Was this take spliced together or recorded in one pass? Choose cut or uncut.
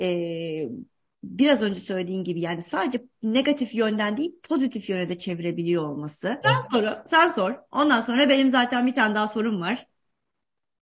cut